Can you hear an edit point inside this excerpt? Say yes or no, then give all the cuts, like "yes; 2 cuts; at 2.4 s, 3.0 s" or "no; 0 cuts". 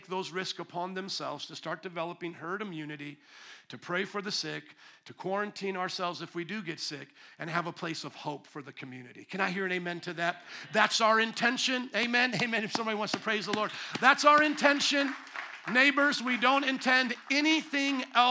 no; 0 cuts